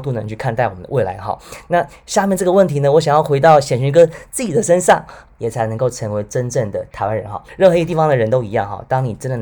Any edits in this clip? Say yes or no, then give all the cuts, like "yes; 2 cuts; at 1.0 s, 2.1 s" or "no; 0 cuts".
yes; 1 cut; at 5.2 s